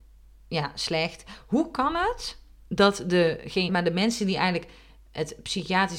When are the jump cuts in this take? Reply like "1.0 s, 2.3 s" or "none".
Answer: 3.7 s